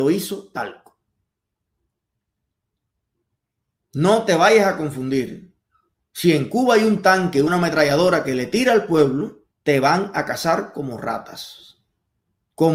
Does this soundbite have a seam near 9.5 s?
yes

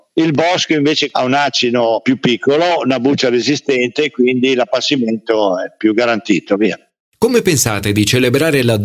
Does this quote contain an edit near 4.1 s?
no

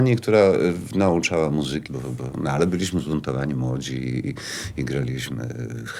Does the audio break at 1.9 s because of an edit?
yes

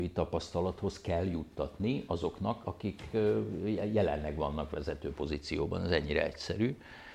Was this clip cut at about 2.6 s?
yes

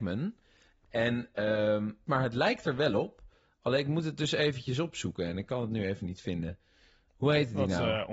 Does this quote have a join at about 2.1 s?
yes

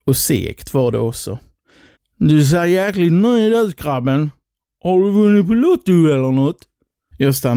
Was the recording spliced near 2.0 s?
yes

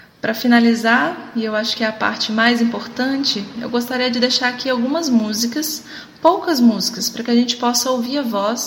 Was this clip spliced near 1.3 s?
no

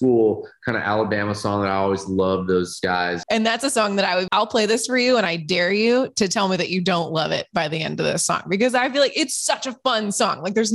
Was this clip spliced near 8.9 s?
no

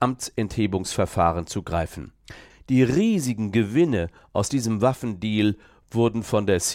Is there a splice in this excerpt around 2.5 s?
yes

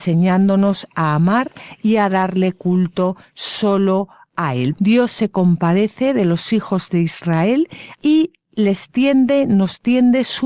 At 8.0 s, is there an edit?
yes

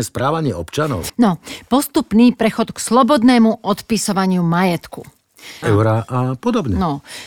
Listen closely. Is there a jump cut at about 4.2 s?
no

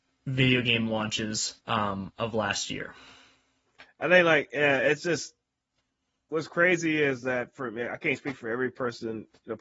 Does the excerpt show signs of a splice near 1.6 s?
yes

